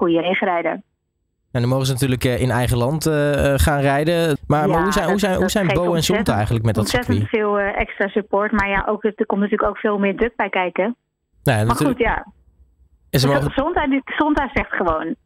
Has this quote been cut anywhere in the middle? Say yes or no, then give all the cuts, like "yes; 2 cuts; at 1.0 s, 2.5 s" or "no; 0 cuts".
yes; 2 cuts; at 4.4 s, 11.3 s